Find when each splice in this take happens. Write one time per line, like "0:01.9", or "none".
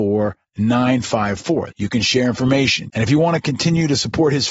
0:01.7
0:02.9